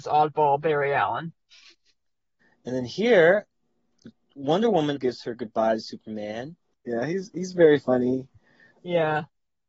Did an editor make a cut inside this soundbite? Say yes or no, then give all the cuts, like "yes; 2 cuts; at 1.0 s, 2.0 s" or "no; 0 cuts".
yes; 2 cuts; at 5.0 s, 6.7 s